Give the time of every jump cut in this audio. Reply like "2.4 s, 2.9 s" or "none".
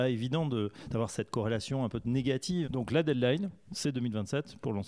2.6 s, 3.7 s